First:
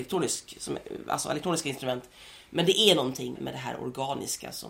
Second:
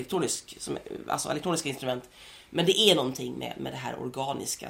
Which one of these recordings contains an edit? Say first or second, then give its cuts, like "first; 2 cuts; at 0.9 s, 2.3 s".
first; 1 cut; at 3.3 s